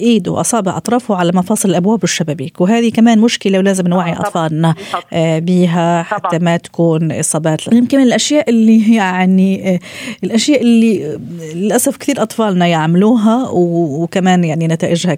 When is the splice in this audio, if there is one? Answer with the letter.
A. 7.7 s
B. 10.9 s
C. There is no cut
A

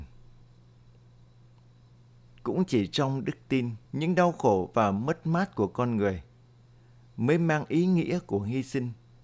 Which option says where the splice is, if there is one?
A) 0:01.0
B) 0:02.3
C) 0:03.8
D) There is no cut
C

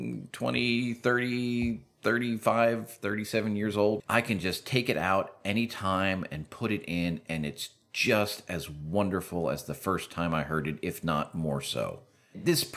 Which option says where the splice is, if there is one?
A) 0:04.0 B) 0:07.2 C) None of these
A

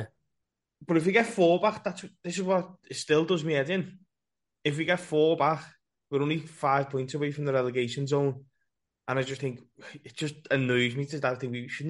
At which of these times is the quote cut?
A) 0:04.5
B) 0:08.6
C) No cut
C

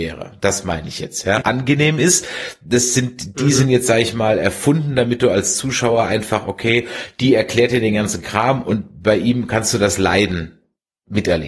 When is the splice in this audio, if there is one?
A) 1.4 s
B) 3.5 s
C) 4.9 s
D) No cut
A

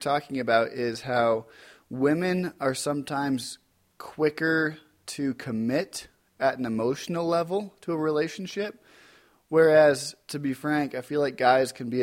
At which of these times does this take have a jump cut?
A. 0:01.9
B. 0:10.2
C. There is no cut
C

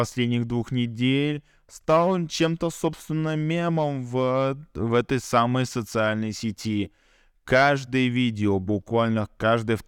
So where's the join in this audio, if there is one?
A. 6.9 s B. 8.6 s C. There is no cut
C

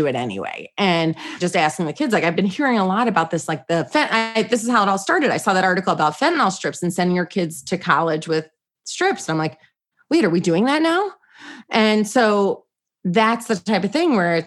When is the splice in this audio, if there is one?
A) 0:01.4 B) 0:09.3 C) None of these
A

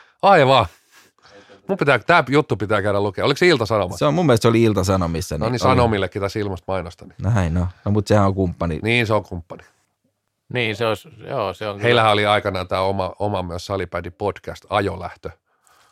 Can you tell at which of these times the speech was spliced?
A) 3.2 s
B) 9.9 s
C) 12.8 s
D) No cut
D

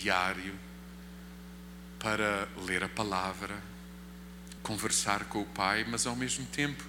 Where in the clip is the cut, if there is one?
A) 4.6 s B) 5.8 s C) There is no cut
A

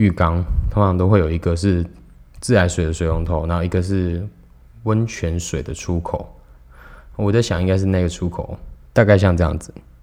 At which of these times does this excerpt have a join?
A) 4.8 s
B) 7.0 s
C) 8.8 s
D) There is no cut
C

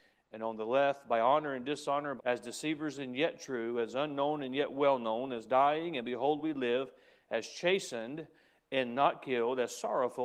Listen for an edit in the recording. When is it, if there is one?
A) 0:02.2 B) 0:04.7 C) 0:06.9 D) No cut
A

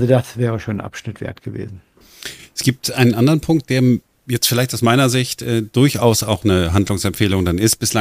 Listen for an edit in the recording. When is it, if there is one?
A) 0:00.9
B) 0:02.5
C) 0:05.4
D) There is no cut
D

